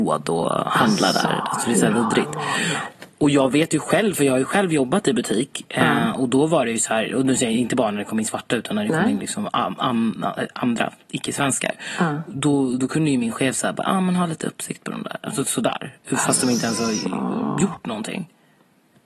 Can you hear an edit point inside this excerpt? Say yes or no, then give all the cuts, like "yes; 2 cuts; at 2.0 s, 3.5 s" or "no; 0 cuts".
no; 0 cuts